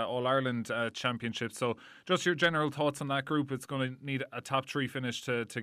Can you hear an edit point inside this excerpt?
yes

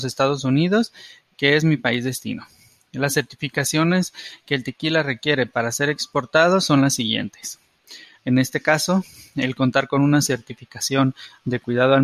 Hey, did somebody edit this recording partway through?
yes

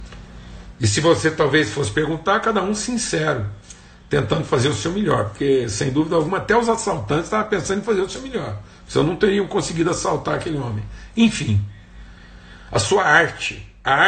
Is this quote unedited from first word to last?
yes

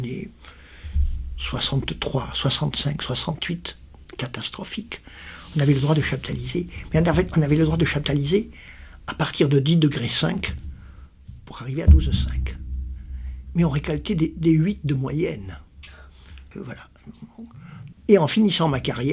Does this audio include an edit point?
yes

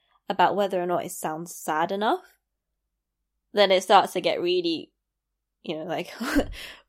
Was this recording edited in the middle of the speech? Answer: yes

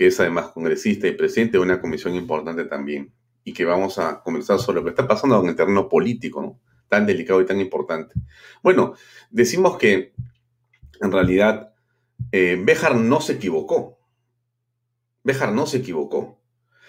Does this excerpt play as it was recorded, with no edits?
yes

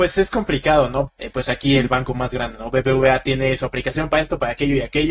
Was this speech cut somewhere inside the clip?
yes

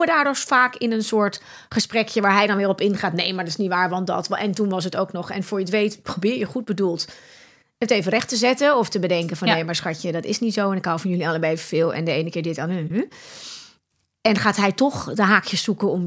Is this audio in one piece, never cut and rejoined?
yes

